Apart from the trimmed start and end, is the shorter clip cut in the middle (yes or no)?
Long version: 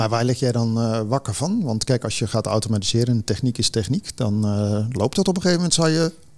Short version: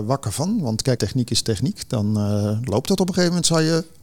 yes